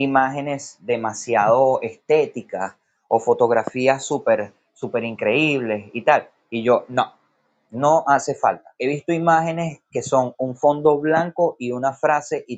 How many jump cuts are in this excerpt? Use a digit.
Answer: 0